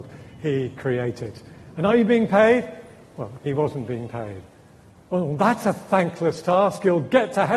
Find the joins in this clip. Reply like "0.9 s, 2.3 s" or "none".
3.4 s